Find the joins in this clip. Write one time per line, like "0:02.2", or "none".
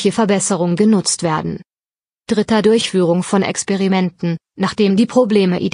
none

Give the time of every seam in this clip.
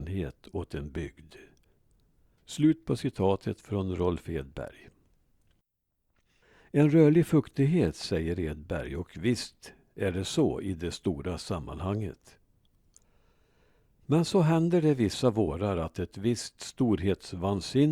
none

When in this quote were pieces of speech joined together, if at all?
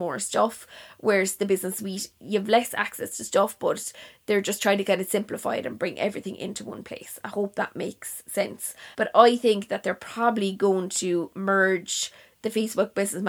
0:08.9

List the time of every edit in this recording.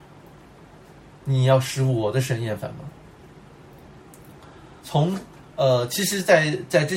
0:04.8

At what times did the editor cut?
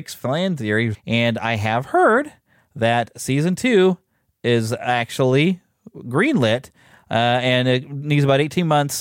0:00.9

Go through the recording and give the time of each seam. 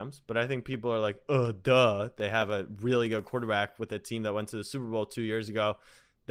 none

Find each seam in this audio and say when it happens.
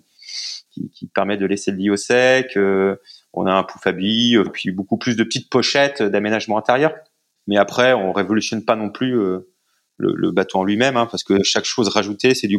0:04.5

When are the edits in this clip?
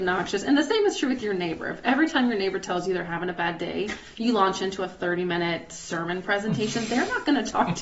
none

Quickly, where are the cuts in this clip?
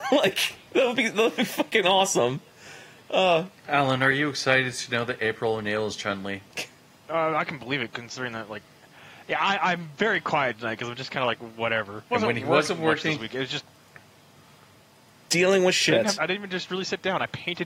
0:12.1
0:16.2

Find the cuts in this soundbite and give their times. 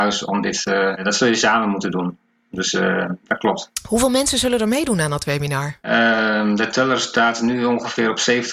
none

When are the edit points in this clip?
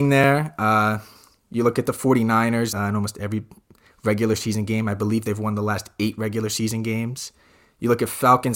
0:02.7

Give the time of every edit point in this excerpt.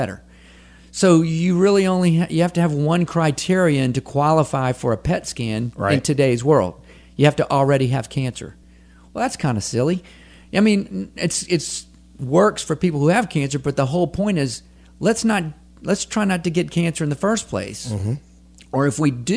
none

